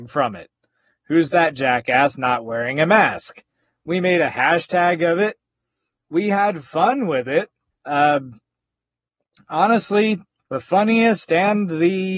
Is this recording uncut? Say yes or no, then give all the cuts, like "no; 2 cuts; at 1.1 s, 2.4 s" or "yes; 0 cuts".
no; 2 cuts; at 7.7 s, 10.4 s